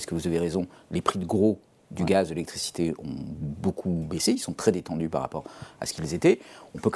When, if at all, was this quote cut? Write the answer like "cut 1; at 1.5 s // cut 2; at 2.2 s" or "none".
none

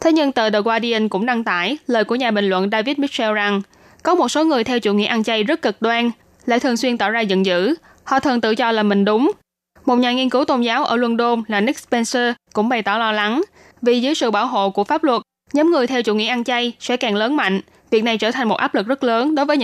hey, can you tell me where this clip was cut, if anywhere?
cut 1; at 6.4 s

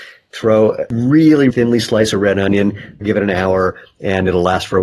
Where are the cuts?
cut 1; at 1.5 s // cut 2; at 3.0 s

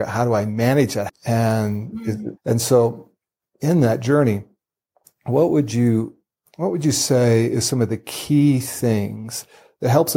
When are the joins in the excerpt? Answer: cut 1; at 1.1 s // cut 2; at 2.4 s

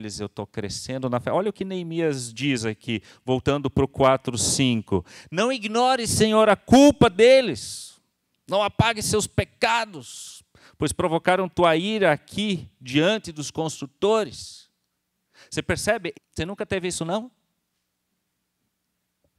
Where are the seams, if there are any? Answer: cut 1; at 16.1 s

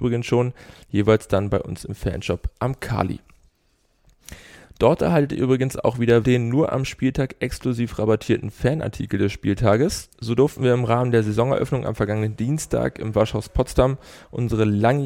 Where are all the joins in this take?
cut 1; at 6.2 s // cut 2; at 10.1 s

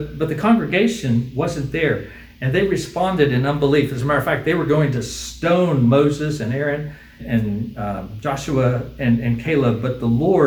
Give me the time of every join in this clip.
cut 1; at 7.2 s

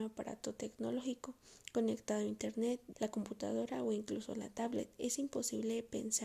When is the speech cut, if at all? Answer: cut 1; at 2.9 s

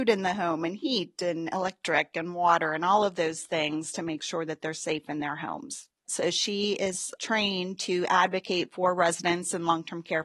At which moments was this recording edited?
cut 1; at 6.0 s

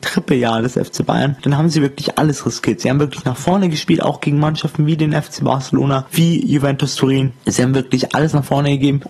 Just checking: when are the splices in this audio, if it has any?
cut 1; at 7.4 s

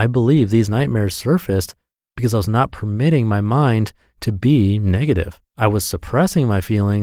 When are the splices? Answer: cut 1; at 5.5 s

